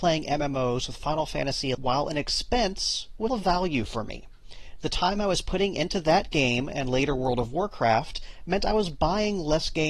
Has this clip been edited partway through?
yes; 2 cuts; at 1.7 s, 3.3 s

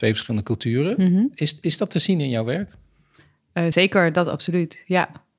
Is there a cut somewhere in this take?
no; 0 cuts

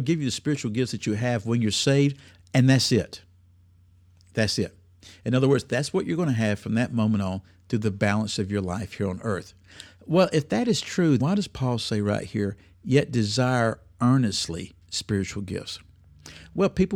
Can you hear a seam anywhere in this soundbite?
yes; 2 cuts; at 11.2 s, 14.8 s

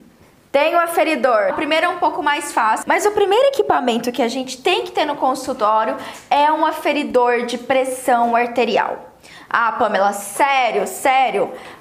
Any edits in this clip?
yes; 2 cuts; at 1.5 s, 2.8 s

